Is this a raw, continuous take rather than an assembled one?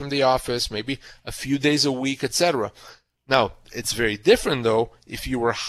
yes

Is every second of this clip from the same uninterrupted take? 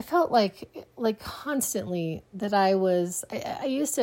yes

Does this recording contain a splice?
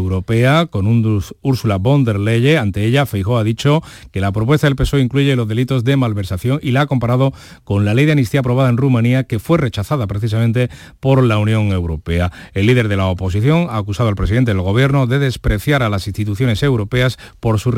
no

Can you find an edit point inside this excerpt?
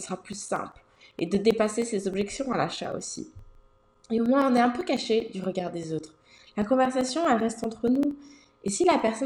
no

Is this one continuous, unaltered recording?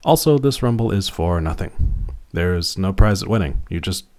yes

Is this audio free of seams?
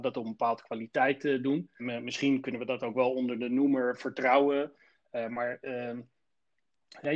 no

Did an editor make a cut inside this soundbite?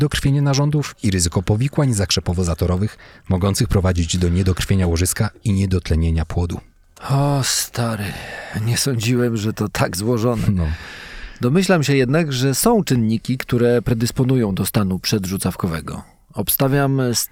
no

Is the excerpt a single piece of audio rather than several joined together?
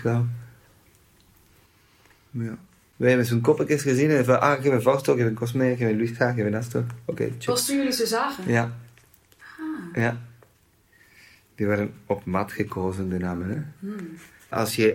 yes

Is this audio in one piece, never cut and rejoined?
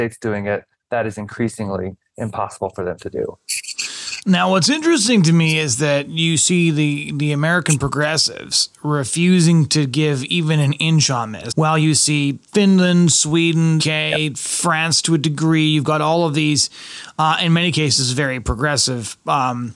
no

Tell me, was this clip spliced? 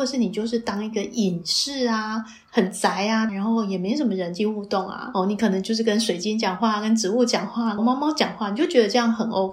yes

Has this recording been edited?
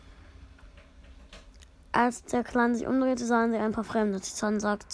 no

